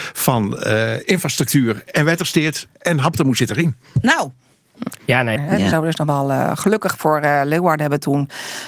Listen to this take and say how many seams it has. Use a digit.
1